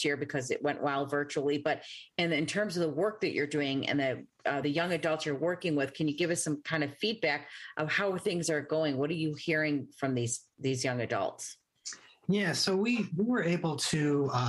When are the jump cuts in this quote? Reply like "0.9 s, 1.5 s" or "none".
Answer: none